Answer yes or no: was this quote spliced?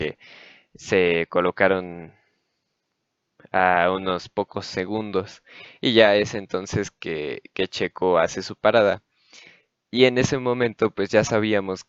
no